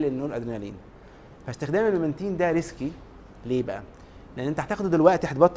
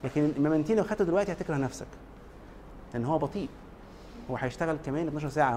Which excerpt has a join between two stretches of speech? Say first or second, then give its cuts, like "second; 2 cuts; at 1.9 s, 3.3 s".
second; 1 cut; at 2.9 s